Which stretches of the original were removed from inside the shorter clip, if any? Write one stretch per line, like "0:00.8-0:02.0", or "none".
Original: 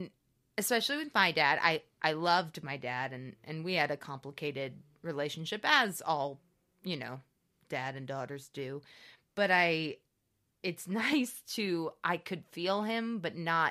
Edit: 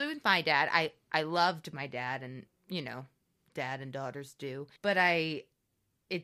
0:03.4-0:06.6
0:08.9-0:09.3

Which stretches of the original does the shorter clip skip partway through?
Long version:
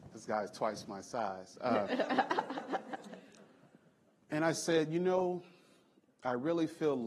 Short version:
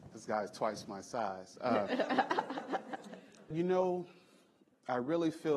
0:03.5-0:04.9

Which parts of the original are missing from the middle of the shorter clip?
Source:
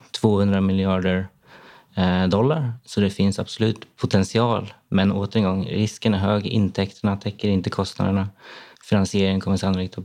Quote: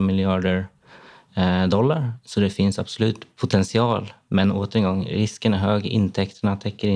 none

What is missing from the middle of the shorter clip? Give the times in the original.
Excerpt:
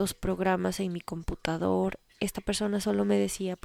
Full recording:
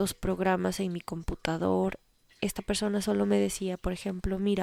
0:02.1-0:02.3

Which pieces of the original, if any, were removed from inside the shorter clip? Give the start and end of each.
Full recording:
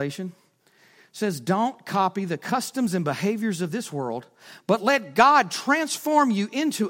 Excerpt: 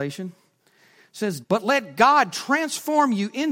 0:01.4-0:04.6

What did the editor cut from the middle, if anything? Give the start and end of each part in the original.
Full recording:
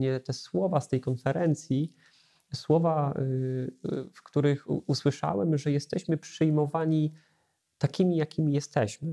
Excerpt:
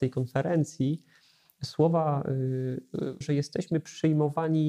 0:04.1-0:05.6

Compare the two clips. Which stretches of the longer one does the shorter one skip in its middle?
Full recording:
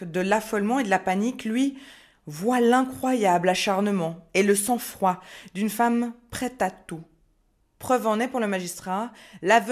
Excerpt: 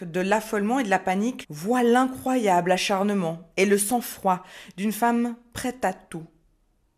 0:01.4-0:02.2

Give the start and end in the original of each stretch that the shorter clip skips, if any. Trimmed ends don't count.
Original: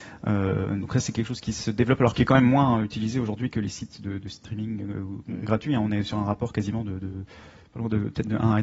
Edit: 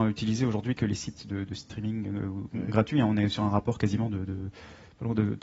none

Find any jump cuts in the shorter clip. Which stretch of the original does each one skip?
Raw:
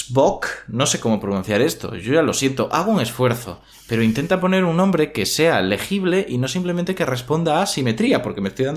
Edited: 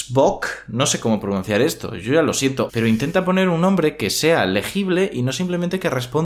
0:02.7-0:03.8

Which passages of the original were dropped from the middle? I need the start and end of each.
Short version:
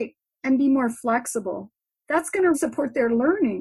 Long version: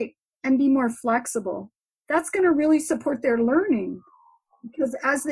0:02.5-0:02.8

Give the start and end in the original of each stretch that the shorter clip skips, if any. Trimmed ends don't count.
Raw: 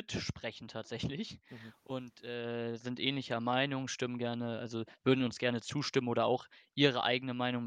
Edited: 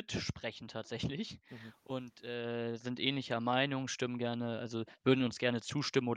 none

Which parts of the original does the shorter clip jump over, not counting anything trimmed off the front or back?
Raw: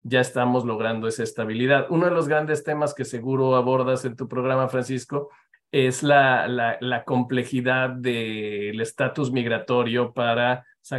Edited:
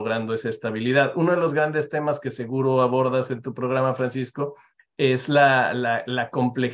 none

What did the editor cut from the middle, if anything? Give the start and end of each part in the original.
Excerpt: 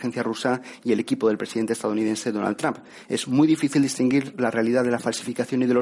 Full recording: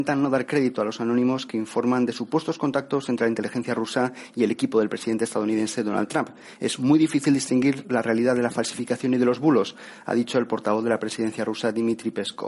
none

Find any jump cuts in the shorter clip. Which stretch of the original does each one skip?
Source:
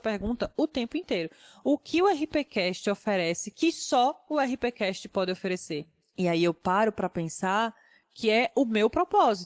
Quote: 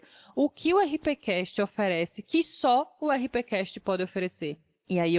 none

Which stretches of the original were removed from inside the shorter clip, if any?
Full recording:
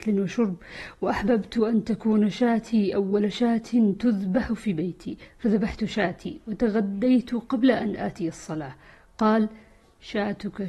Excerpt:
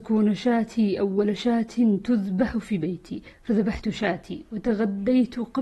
none

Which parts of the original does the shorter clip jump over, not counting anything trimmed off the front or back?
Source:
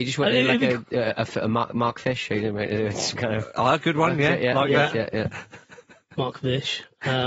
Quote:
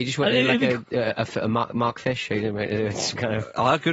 none

